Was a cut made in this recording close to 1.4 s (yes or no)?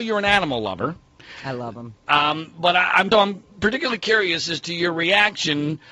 no